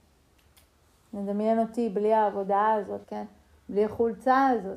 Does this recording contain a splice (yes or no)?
yes